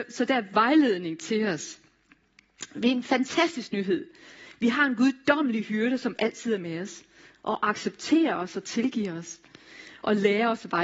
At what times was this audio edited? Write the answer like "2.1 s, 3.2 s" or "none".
none